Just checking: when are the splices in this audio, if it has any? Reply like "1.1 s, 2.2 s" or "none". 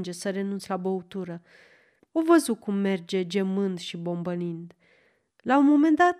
2.0 s